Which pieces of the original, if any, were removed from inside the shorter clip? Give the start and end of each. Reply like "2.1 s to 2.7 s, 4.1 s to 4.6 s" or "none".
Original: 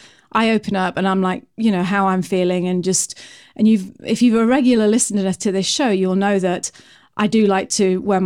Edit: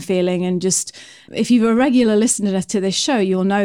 3.5 s to 4.0 s